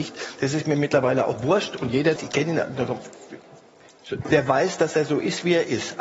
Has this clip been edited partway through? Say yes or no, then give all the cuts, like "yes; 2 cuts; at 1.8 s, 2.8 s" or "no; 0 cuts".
yes; 2 cuts; at 2.2 s, 4.2 s